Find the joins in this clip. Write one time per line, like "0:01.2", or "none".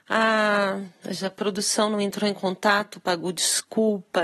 none